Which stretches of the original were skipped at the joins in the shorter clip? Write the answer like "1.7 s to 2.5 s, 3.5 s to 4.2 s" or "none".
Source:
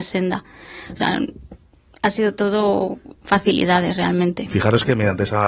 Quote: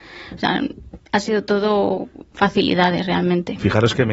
1.6 s to 1.9 s